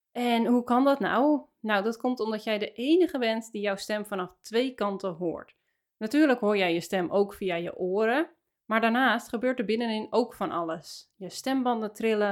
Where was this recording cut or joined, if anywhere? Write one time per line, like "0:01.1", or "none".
none